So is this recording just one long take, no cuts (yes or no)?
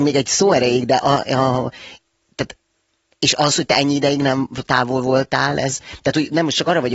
yes